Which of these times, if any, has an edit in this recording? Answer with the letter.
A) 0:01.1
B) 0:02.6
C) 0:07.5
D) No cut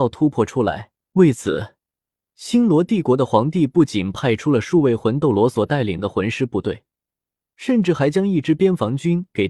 A